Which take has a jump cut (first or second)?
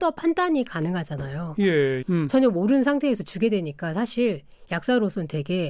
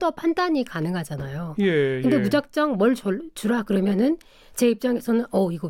first